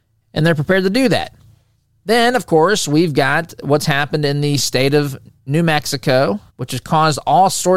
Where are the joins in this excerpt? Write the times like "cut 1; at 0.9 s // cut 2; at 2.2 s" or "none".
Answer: cut 1; at 6.5 s